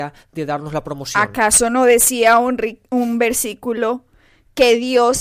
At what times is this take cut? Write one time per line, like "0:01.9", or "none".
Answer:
none